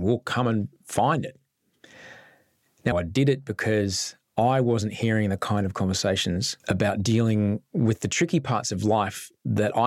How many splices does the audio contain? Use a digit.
2